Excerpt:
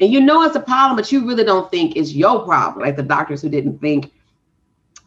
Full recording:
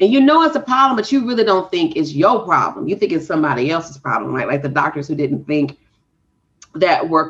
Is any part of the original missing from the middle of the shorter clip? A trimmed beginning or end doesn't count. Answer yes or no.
yes